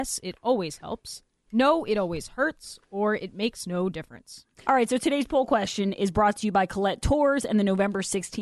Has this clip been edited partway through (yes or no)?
yes